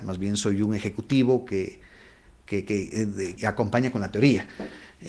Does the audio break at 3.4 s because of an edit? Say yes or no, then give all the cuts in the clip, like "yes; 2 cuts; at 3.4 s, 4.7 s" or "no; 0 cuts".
yes; 1 cut; at 3.4 s